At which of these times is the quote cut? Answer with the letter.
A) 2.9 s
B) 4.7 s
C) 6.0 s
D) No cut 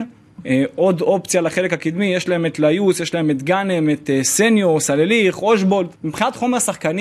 C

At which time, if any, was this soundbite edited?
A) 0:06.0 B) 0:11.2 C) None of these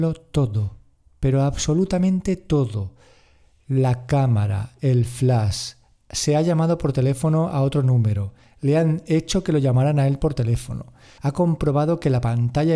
B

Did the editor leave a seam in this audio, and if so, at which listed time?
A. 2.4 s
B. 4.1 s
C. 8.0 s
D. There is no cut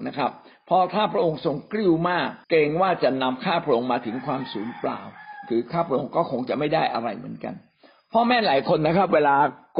A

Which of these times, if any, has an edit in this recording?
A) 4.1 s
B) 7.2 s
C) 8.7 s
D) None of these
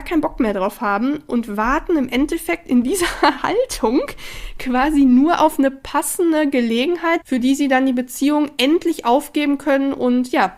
B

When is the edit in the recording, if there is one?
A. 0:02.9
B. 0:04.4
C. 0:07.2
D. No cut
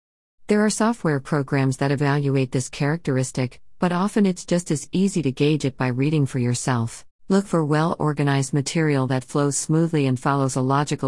C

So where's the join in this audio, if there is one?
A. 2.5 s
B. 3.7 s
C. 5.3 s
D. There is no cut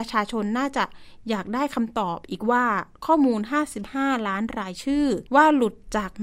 C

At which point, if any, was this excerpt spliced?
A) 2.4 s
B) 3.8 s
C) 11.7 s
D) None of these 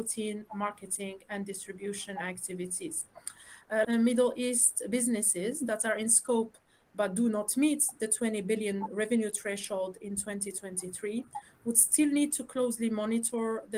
B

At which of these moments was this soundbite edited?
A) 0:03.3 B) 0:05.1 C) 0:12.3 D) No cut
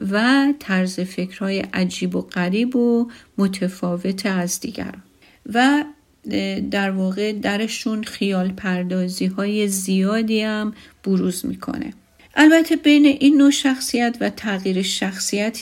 C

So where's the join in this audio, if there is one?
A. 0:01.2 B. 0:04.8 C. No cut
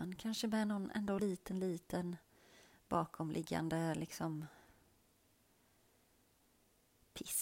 A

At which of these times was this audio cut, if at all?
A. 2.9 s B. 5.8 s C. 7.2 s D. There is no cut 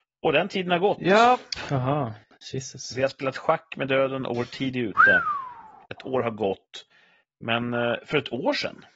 C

